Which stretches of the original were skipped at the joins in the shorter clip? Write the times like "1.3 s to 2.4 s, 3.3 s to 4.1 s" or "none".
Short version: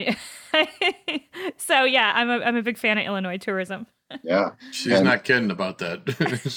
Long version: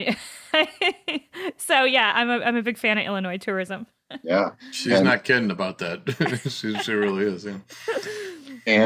none